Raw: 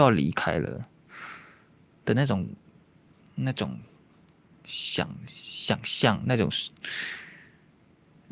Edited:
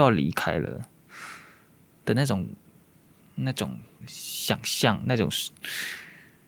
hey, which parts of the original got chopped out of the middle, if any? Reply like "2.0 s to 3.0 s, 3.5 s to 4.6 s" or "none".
4.0 s to 5.2 s